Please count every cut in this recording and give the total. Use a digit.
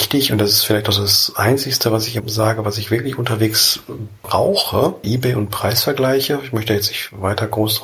2